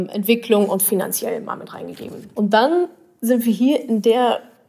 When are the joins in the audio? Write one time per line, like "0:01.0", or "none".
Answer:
0:02.3

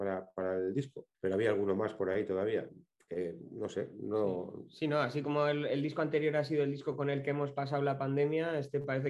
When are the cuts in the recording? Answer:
0:01.1

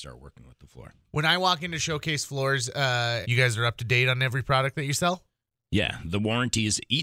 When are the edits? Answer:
0:03.2

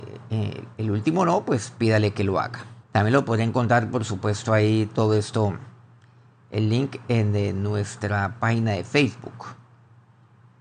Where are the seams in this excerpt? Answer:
0:02.8

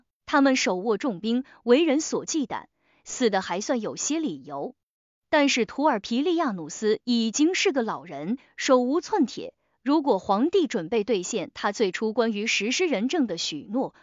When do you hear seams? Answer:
none

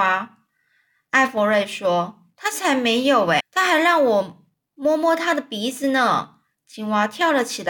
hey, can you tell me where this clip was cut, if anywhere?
0:03.4

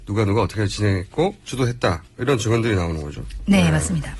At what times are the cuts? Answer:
0:01.4

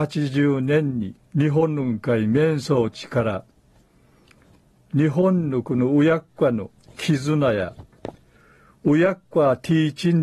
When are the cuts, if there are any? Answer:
0:01.2

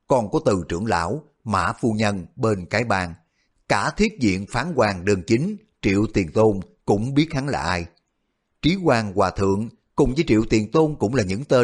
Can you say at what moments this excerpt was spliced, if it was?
none

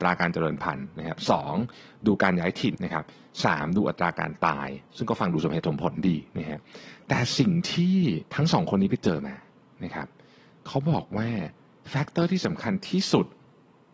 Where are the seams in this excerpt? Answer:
0:02.7
0:04.9
0:08.3

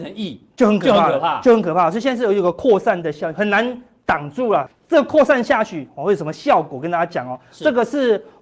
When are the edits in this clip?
none

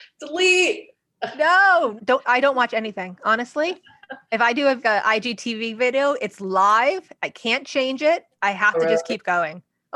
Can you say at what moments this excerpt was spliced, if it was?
0:02.0
0:04.8
0:07.2

